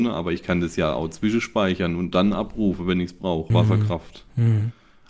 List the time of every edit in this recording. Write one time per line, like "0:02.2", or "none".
0:03.5